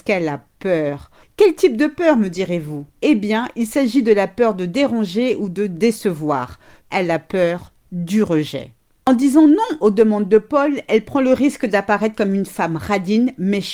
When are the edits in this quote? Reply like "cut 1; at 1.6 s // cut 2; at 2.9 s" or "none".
cut 1; at 1.2 s // cut 2; at 2.9 s // cut 3; at 6.8 s